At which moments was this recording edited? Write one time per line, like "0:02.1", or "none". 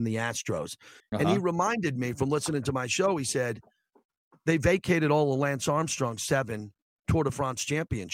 0:01.0